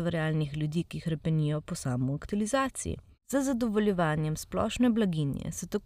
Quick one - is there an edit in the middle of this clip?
yes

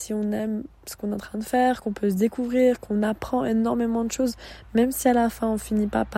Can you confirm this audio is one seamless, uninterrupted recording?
yes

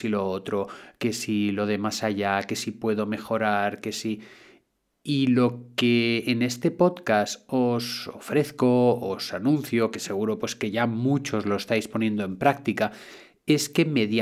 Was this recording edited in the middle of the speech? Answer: no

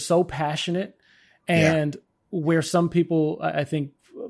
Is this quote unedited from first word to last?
yes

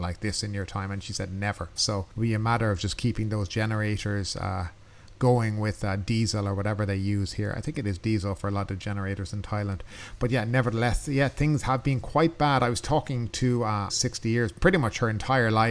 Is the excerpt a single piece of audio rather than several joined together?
no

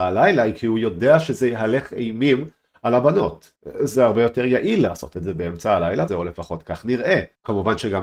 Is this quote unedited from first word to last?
no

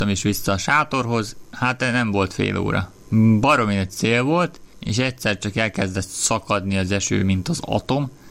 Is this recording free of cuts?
yes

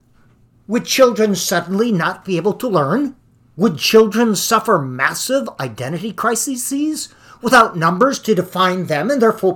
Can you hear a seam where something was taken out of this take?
yes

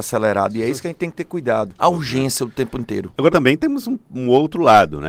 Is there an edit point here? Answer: yes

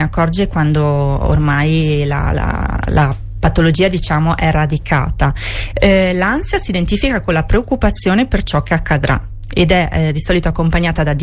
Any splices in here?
yes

